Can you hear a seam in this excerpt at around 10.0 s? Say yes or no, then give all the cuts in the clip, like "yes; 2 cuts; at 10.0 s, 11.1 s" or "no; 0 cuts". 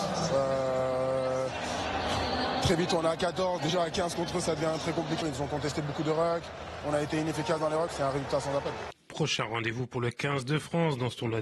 no; 3 cuts; at 3.6 s, 5.2 s, 7.9 s